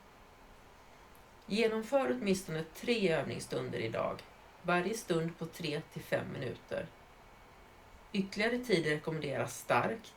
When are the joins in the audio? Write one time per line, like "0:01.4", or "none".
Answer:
none